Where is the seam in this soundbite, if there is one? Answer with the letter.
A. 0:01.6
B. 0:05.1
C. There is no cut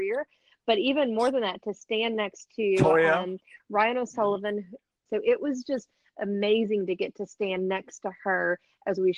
B